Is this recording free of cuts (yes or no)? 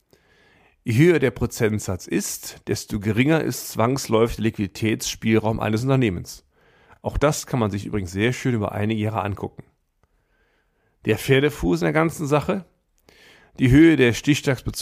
yes